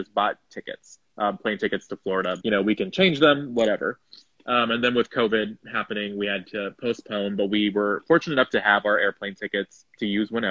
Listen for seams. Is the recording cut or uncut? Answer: cut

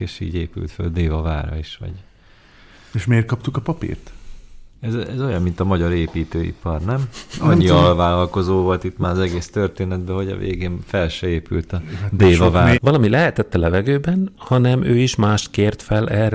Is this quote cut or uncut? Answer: cut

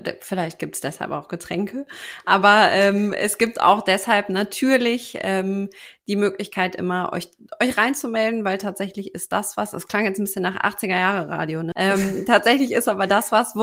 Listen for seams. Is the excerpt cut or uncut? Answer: cut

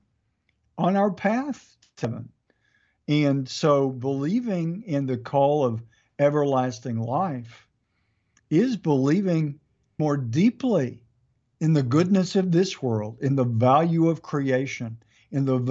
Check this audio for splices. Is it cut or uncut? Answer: cut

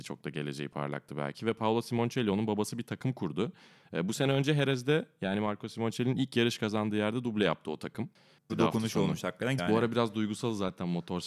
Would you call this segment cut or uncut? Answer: cut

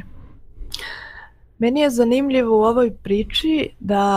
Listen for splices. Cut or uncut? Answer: uncut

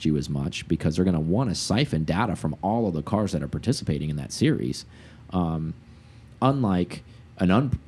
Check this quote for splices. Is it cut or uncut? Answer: uncut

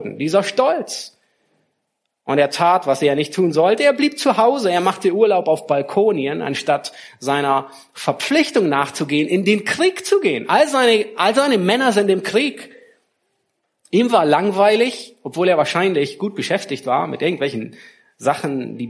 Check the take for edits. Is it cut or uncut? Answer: uncut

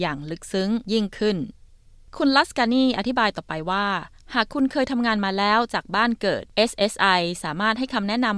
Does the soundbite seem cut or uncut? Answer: uncut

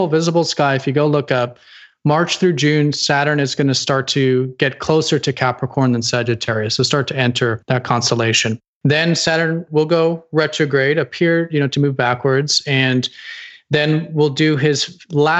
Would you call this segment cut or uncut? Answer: uncut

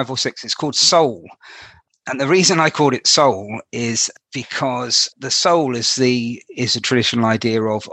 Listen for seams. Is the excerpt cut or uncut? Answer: uncut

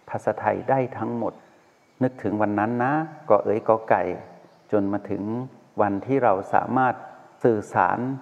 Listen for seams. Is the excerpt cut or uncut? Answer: uncut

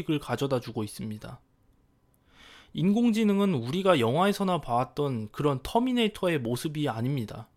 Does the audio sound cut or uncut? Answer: uncut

